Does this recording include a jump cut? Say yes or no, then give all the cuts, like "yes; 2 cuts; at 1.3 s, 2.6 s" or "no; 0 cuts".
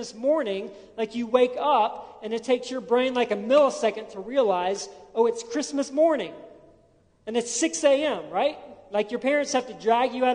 no; 0 cuts